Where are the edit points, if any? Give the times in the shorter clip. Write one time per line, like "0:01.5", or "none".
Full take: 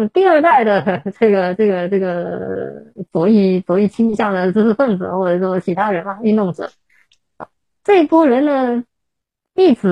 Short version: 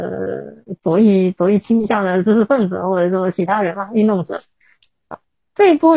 none